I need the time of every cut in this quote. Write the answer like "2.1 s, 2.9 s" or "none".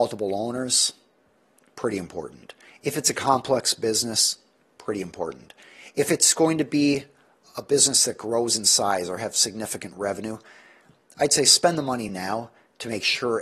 none

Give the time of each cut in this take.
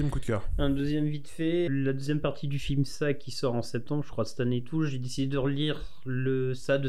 1.7 s

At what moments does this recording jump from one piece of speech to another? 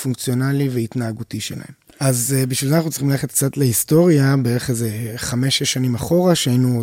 1.9 s

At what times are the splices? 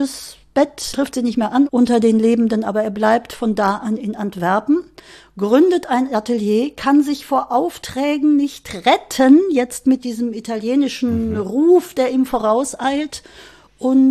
0.9 s

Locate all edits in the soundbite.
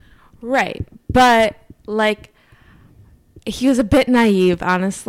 none

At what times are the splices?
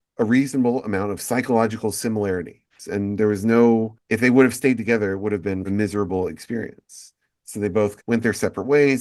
2.8 s

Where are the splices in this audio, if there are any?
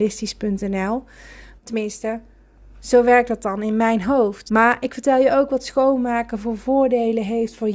1.6 s, 4.5 s

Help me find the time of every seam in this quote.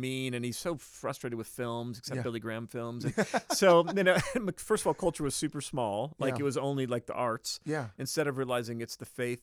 none

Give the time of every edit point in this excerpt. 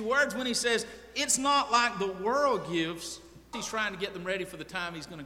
3.5 s

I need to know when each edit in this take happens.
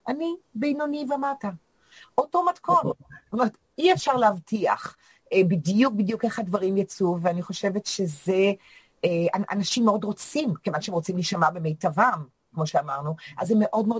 none

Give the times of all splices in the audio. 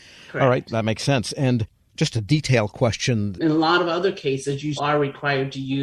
3.3 s, 4.8 s

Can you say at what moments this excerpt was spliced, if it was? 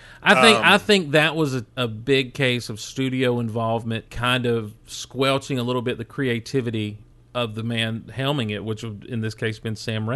1.8 s, 4.1 s, 7.1 s

